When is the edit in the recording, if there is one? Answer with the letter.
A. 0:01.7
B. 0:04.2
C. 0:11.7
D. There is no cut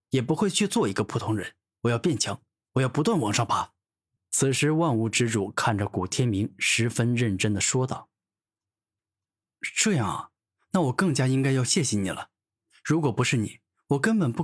B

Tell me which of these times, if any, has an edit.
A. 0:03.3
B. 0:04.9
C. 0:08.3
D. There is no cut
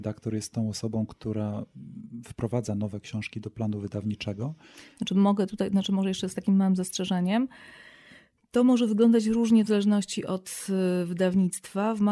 D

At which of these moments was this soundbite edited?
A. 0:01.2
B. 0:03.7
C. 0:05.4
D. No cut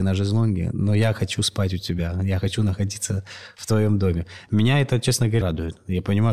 C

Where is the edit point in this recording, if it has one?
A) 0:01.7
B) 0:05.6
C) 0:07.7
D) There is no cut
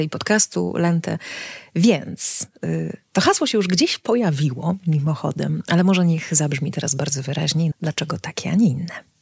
C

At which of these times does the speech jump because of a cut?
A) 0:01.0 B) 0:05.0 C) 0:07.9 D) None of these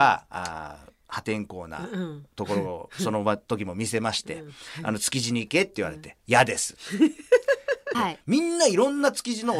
C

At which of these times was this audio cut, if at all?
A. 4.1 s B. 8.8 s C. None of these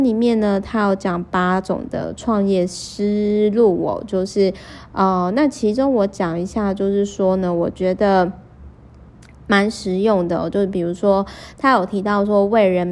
C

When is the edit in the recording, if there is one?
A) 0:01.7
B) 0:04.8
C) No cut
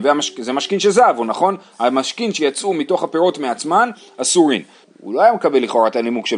B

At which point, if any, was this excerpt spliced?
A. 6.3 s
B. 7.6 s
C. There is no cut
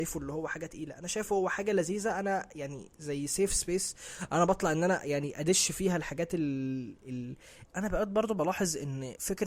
B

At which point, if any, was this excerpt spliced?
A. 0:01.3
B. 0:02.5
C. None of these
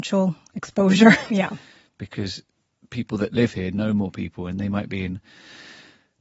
A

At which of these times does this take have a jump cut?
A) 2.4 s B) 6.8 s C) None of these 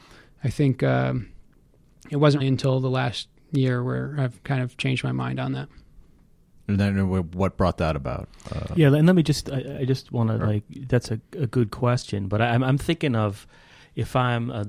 A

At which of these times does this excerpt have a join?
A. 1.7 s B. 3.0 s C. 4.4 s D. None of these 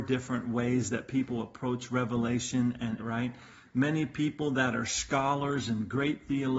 B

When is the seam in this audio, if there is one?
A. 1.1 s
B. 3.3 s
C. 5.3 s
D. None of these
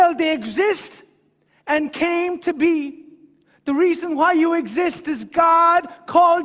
D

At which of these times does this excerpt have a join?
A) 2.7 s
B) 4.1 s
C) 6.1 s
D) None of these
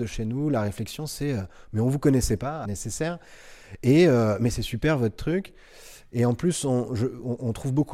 A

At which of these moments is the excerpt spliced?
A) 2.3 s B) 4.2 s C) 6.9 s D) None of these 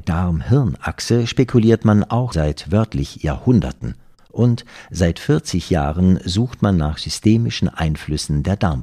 A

